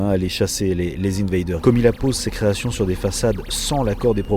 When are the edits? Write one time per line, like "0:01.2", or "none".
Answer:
0:01.6